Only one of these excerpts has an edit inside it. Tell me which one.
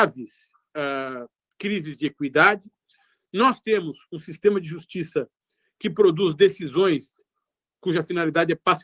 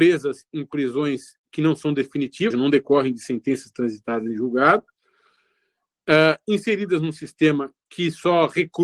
second; 1 cut; at 2.5 s

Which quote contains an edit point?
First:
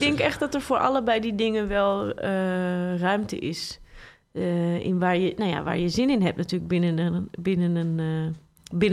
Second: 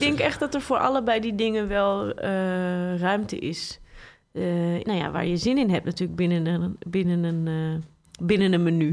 second; 1 cut; at 4.8 s

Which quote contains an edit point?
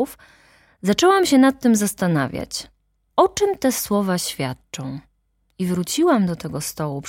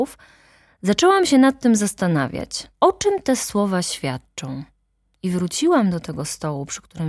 second; 1 cut; at 2.7 s

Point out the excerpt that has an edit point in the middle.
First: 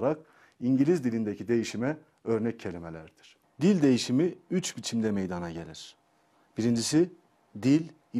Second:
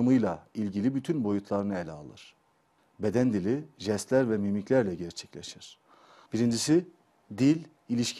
second; 2 cuts; at 2.8 s, 6.3 s

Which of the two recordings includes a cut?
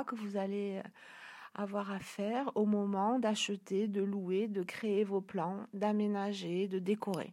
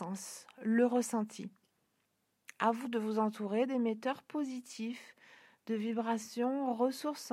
second; 1 cut; at 2.8 s

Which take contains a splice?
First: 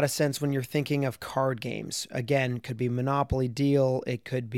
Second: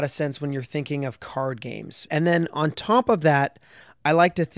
second; 1 cut; at 2.1 s

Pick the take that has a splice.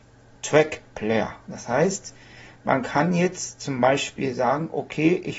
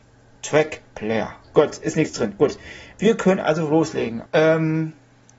second; 2 cuts; at 1.4 s, 4.3 s

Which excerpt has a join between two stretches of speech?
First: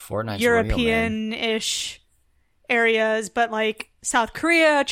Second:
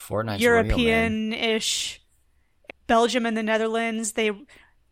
second; 1 cut; at 2.7 s

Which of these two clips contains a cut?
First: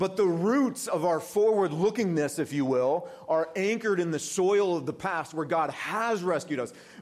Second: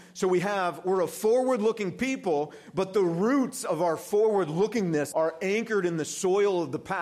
second; 1 cut; at 5.1 s

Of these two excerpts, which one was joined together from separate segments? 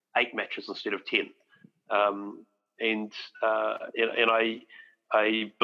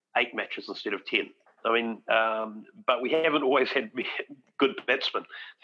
second; 1 cut; at 1.5 s

